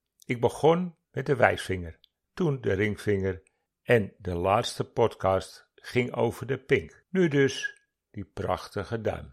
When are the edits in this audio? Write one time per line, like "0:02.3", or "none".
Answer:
0:02.2